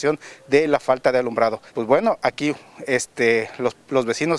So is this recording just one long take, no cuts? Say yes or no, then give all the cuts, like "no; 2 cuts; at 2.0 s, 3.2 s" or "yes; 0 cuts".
no; 1 cut; at 1.7 s